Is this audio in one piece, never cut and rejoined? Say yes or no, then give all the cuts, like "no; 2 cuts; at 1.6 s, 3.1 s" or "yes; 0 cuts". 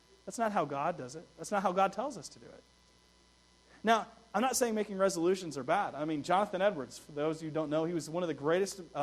yes; 0 cuts